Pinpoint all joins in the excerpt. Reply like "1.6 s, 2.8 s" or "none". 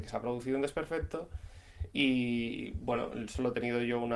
none